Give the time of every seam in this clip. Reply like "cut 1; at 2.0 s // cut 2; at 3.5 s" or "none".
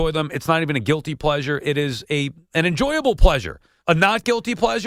cut 1; at 3.8 s